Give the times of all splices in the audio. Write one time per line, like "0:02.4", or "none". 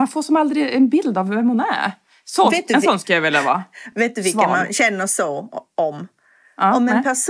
none